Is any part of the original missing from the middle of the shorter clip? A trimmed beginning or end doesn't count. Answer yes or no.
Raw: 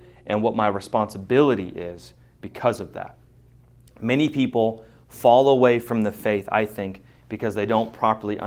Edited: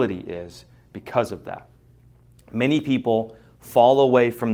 no